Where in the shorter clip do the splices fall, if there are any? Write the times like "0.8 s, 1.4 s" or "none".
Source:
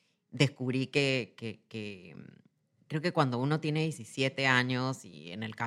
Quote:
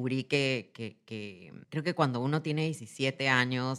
1.6 s